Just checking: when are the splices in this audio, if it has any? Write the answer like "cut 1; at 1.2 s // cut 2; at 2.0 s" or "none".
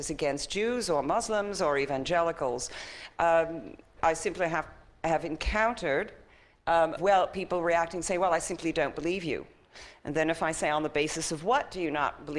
cut 1; at 4.0 s // cut 2; at 7.0 s